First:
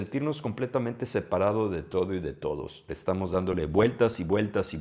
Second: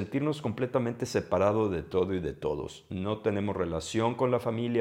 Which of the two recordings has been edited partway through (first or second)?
first